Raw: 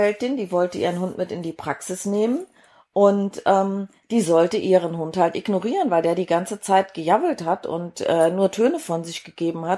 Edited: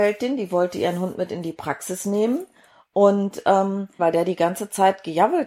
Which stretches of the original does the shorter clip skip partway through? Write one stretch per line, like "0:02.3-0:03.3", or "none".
0:04.0-0:05.9